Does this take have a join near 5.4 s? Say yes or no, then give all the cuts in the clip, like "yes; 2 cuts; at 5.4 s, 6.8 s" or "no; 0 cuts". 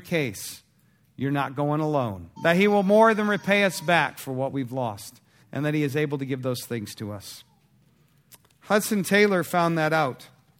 yes; 2 cuts; at 2.4 s, 5.4 s